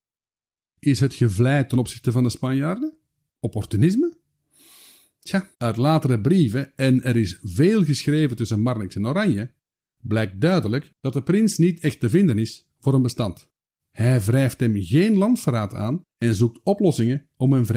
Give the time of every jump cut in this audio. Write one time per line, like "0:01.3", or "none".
0:05.5
0:13.8
0:16.1

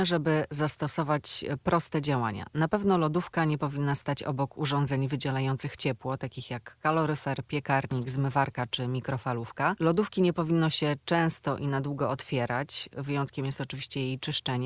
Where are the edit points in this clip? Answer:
none

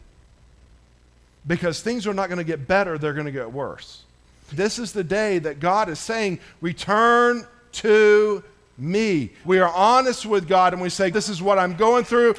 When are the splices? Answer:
0:04.5
0:09.4
0:11.1

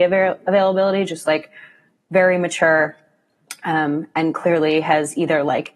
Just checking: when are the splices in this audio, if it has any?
none

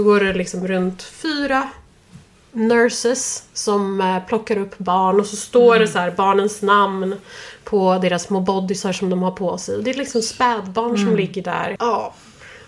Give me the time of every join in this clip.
0:11.8

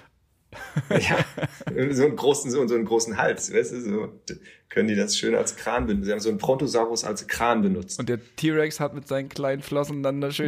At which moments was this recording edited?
none

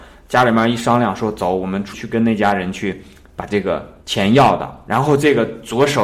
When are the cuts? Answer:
0:01.9
0:04.0

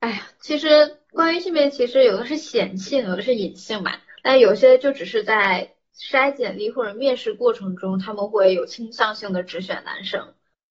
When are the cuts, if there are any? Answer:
0:04.2

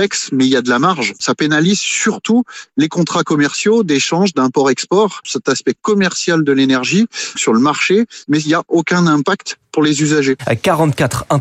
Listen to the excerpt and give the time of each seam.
0:07.3
0:10.4

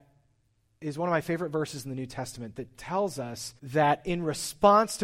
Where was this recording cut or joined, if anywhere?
0:03.6

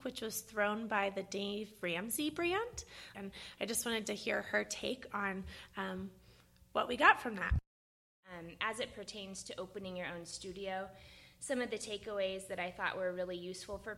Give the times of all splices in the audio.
0:03.1

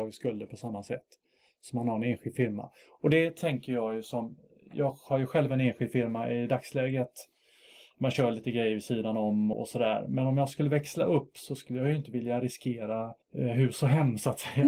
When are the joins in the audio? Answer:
0:09.5
0:13.2

